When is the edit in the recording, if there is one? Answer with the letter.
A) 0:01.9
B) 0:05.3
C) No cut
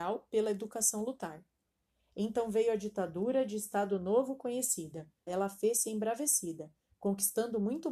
B